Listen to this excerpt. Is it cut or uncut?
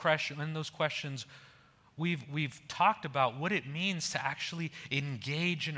uncut